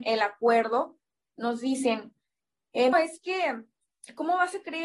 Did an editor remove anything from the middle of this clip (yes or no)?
yes